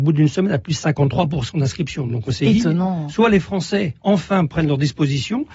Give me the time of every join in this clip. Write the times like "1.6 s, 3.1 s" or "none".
none